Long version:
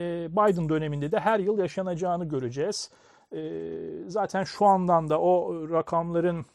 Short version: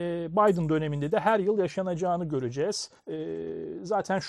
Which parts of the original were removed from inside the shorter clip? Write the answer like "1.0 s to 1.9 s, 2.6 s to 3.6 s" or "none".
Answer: 3.0 s to 3.2 s